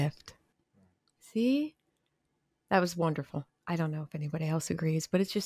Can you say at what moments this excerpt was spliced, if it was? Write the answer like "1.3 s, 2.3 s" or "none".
2.6 s